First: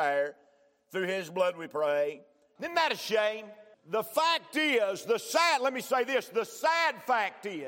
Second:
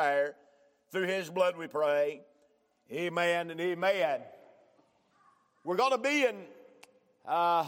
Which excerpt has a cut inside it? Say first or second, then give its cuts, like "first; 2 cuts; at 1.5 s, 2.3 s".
first; 2 cuts; at 2.6 s, 3.7 s